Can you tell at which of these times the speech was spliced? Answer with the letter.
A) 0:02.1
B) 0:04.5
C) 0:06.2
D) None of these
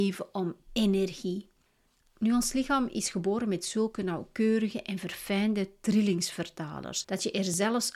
A